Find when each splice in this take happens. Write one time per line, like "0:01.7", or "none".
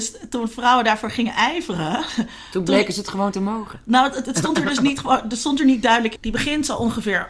0:06.2